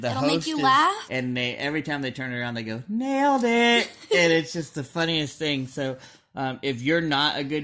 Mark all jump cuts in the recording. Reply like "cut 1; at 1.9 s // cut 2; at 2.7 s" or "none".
cut 1; at 1.1 s